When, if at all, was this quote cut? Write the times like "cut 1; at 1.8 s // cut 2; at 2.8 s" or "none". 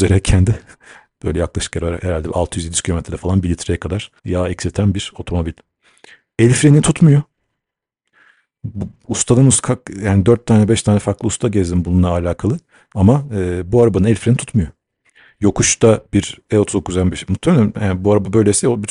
cut 1; at 4.2 s